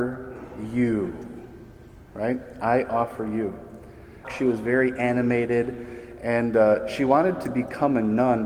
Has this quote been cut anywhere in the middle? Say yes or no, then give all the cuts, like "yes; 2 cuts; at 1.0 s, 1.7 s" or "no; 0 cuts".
yes; 1 cut; at 4.2 s